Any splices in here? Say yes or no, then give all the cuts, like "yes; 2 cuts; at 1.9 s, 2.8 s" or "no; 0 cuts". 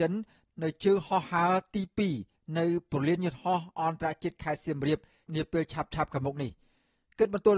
no; 0 cuts